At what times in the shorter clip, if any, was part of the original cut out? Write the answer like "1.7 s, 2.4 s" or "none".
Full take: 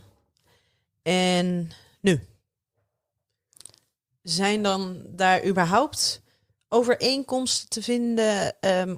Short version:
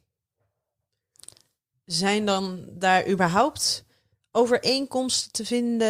none